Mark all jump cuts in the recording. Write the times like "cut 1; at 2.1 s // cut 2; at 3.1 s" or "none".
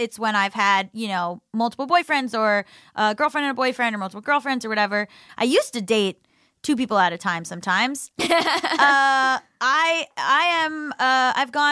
cut 1; at 5.3 s // cut 2; at 8.1 s

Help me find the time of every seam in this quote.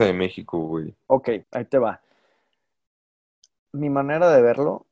cut 1; at 1.4 s

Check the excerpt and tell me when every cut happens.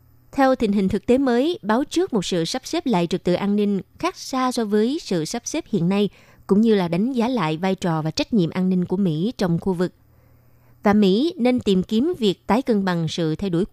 none

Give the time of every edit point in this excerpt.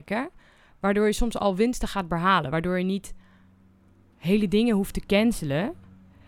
none

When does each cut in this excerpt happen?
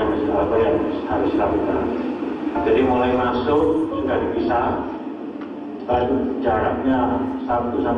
cut 1; at 5.8 s

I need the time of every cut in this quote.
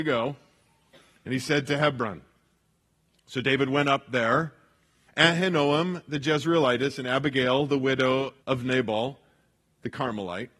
cut 1; at 5.1 s // cut 2; at 8.4 s

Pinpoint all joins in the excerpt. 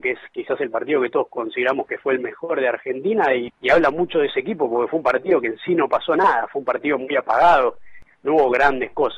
none

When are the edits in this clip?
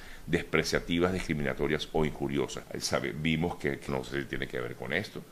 cut 1; at 2.6 s // cut 2; at 3.9 s

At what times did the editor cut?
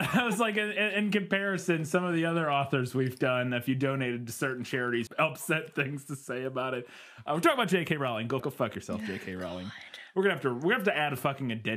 cut 1; at 5.1 s // cut 2; at 8.4 s

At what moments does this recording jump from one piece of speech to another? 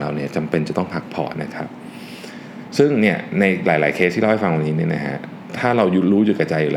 cut 1; at 1.3 s

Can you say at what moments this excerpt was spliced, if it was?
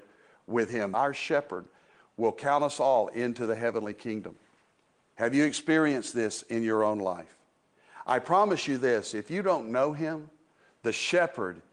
cut 1; at 0.9 s // cut 2; at 5.1 s

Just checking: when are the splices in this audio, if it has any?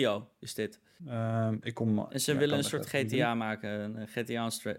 cut 1; at 1.0 s

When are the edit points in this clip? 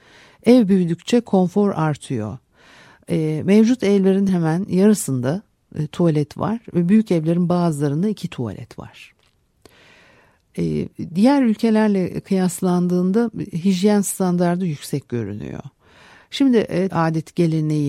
cut 1; at 4.3 s // cut 2; at 16.9 s

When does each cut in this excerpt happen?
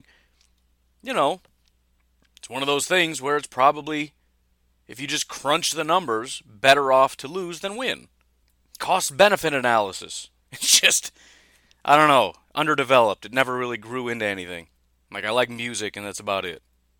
cut 1; at 10.4 s

